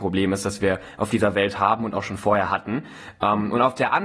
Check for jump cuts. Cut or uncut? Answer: uncut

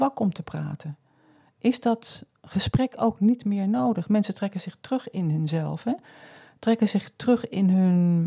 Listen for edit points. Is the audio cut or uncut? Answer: uncut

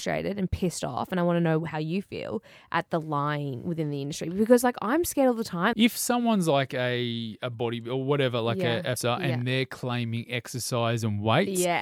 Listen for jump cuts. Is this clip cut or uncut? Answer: cut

